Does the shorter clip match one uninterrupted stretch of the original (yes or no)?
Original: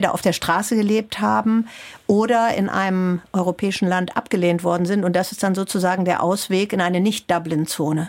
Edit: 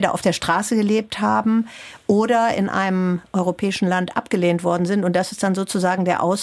yes